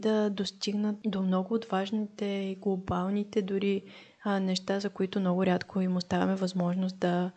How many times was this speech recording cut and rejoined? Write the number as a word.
zero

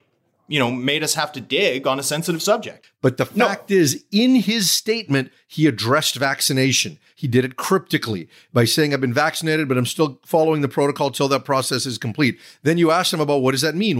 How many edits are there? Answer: one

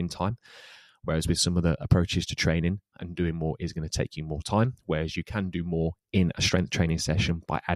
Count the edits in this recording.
one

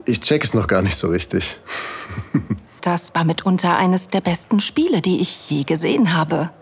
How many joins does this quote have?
one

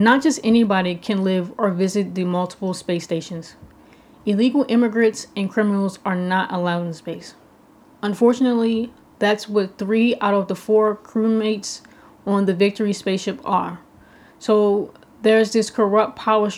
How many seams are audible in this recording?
zero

